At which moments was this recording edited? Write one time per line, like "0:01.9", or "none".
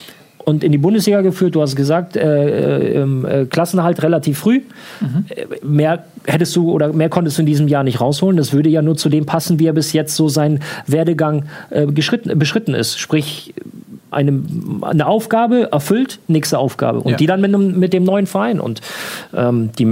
0:14.1

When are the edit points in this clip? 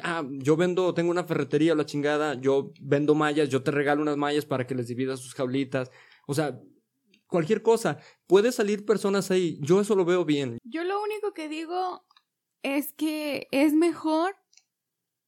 0:10.6

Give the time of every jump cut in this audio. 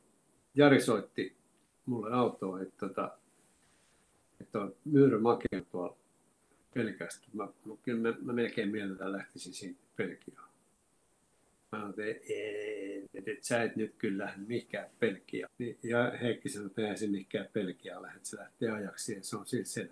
0:15.5

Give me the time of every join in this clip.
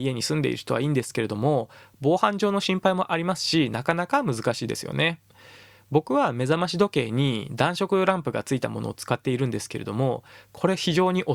none

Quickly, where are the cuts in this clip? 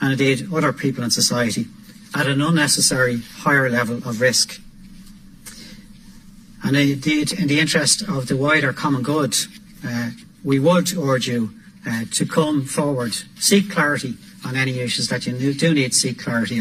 none

